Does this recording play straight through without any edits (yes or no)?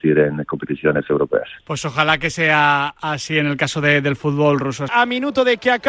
no